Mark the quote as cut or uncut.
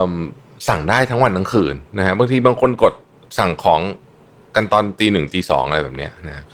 uncut